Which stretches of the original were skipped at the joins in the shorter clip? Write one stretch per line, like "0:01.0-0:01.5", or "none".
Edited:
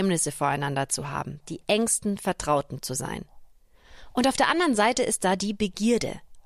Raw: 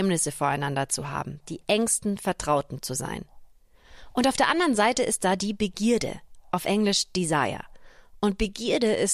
none